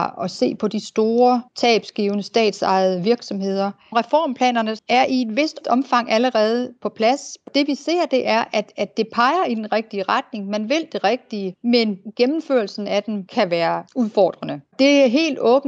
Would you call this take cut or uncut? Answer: uncut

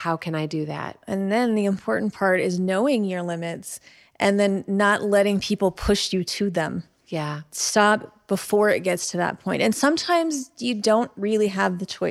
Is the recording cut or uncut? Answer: uncut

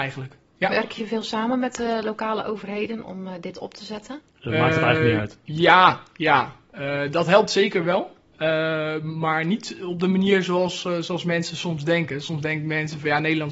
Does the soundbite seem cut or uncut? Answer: cut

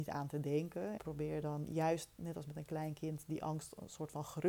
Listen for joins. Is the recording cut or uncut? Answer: cut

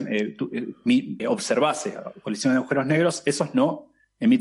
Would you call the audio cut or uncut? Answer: cut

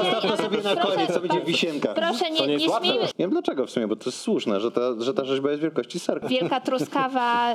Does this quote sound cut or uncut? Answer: cut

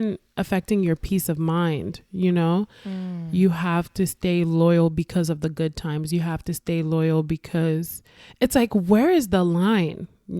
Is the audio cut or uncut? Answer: uncut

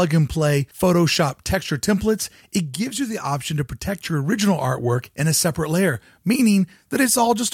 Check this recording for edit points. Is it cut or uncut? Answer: uncut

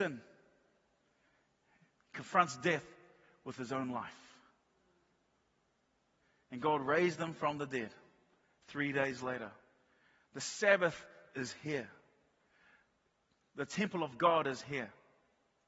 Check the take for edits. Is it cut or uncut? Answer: uncut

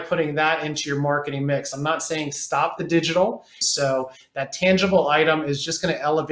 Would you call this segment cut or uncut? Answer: cut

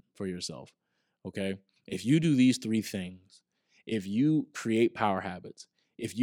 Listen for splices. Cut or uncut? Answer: cut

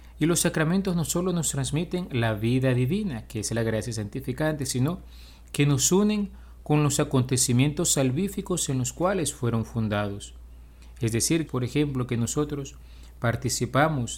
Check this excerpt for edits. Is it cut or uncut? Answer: cut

